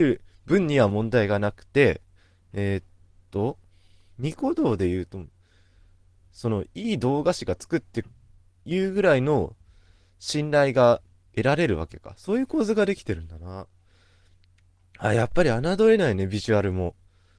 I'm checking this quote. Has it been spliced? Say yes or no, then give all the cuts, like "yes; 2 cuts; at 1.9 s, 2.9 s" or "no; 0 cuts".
no; 0 cuts